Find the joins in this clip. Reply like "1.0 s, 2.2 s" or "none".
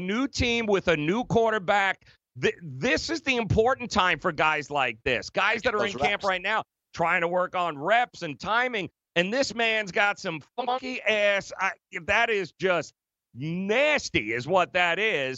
none